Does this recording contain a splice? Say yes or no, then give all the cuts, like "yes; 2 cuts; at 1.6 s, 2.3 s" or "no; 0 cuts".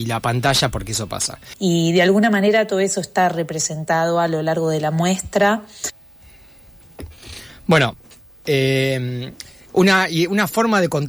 yes; 1 cut; at 1.5 s